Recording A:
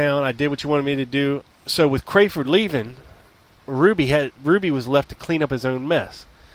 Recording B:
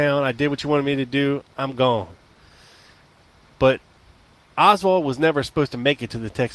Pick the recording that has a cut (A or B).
A